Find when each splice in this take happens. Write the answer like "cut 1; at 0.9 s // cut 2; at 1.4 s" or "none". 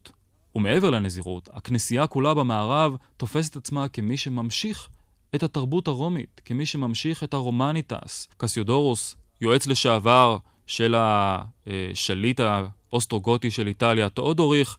cut 1; at 8.3 s